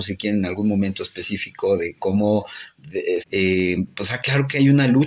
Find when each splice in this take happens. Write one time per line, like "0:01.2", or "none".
0:03.2